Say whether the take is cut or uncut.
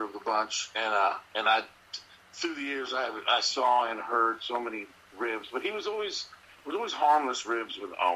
uncut